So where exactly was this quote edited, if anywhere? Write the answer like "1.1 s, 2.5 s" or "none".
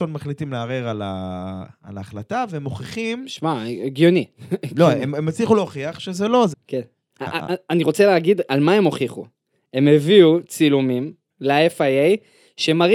6.5 s